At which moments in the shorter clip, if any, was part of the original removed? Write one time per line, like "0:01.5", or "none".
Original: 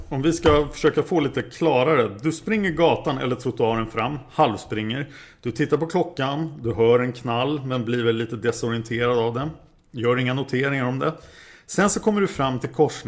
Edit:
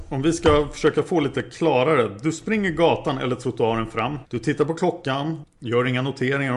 0:04.2
0:05.4